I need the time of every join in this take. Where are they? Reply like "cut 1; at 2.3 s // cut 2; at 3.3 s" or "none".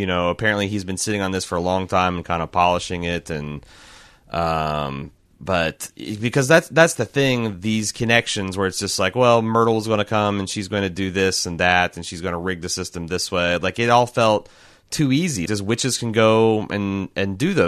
cut 1; at 15.5 s